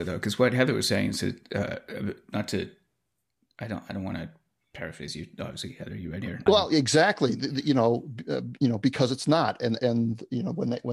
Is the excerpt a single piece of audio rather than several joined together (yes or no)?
no